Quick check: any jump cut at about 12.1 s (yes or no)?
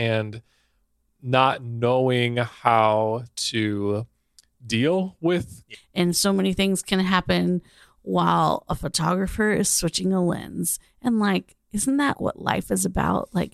yes